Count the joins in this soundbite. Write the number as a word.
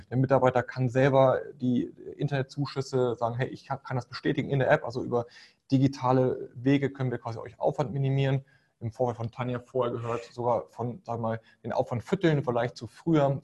zero